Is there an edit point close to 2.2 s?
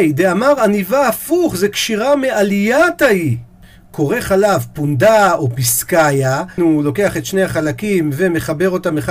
no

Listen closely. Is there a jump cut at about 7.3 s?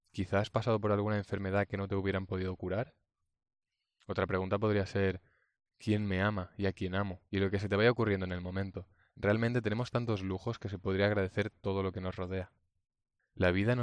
yes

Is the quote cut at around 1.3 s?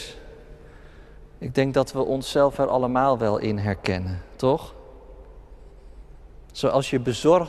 no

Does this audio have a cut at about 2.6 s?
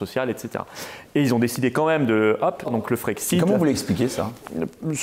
yes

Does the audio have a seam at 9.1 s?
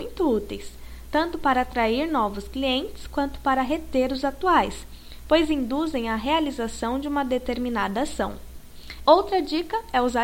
yes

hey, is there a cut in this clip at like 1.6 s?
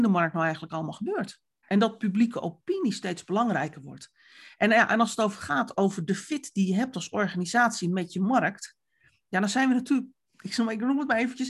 yes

